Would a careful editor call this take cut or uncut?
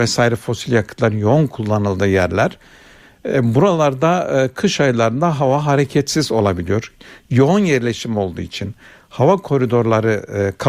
uncut